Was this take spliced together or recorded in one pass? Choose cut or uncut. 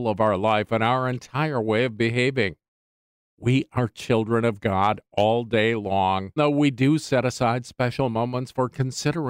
cut